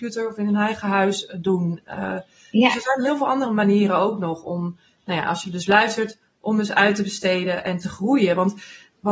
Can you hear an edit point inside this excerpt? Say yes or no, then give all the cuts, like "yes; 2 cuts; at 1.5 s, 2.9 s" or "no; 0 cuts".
no; 0 cuts